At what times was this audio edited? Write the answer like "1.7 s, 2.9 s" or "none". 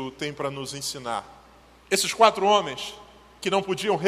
1.8 s